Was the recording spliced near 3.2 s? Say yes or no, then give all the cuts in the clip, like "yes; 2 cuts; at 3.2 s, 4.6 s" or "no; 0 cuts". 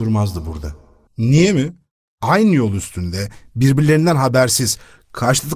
no; 1 cut; at 1.1 s